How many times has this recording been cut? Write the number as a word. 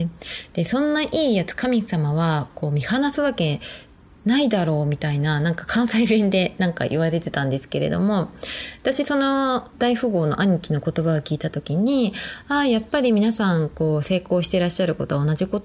zero